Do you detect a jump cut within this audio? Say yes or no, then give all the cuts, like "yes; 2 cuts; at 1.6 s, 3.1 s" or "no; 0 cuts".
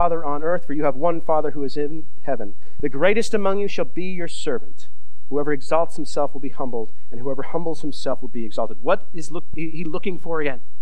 yes; 2 cuts; at 2.8 s, 9.5 s